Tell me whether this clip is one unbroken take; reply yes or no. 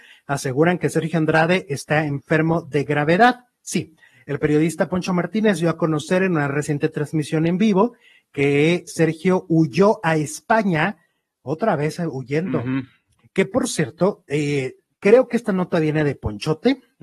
no